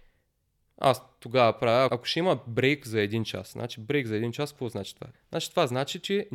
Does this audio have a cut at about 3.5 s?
no; 2 cuts; at 1.9 s, 5.1 s

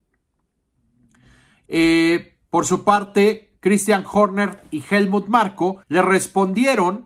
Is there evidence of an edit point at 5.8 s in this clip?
yes; 2 cuts; at 1.6 s, 5.8 s

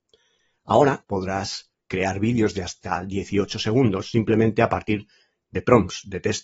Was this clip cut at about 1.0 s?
yes; 1 cut; at 1.0 s

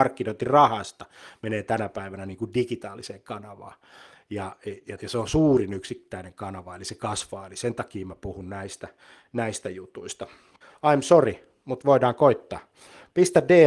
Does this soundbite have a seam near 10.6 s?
yes; 2 cuts; at 5.0 s, 10.6 s

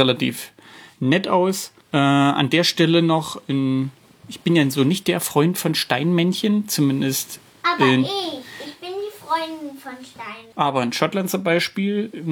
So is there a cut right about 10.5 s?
yes; 2 cuts; at 1.8 s, 10.5 s

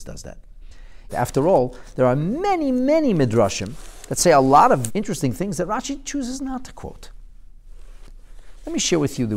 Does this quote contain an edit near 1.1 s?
yes; 2 cuts; at 1.1 s, 4.9 s

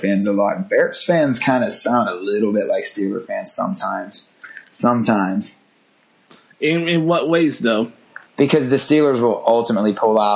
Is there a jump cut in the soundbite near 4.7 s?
no; 1 cut; at 8.3 s

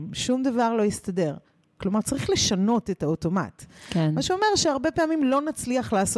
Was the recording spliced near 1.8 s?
yes; 1 cut; at 1.8 s

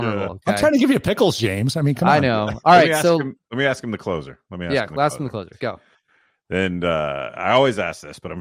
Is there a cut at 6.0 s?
no; 1 cut; at 2.6 s

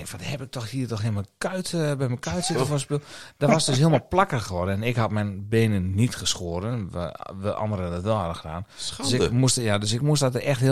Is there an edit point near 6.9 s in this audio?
no; 0 cuts

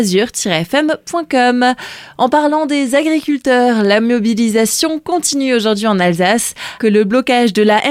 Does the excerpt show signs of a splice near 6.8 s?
yes; 1 cut; at 6.8 s

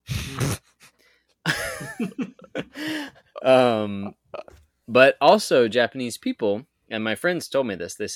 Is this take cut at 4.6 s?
no; 0 cuts

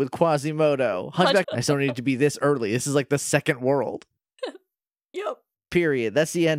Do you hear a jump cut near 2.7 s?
no; 2 cuts; at 1.4 s, 5.5 s

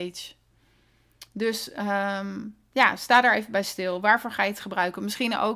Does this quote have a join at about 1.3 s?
no; 0 cuts

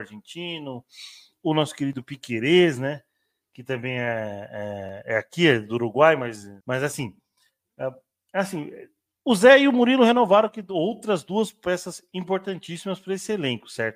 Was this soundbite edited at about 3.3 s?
no; 1 cut; at 6.6 s

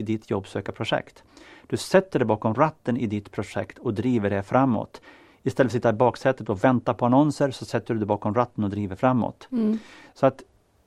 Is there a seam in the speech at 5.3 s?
no; 0 cuts

